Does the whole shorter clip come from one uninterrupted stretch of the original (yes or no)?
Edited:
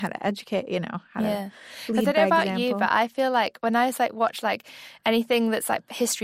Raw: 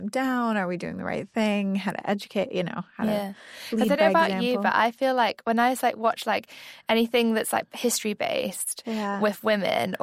yes